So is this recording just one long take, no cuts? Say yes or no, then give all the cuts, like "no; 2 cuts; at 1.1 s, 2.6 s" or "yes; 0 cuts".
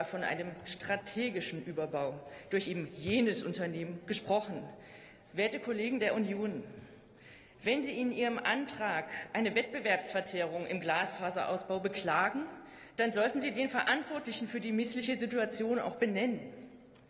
yes; 0 cuts